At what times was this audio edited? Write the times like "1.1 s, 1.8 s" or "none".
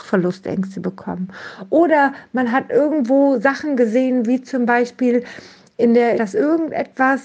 6.2 s